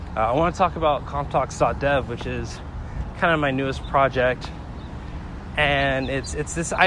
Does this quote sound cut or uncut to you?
uncut